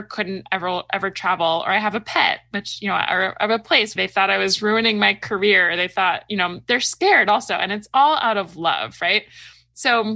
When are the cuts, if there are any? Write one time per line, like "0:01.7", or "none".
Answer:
0:04.0